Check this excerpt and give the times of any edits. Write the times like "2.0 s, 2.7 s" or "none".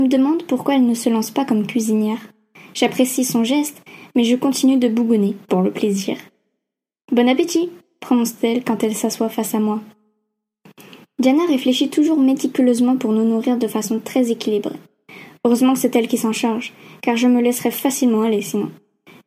5.5 s